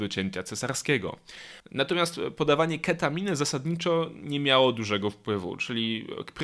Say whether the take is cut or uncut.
cut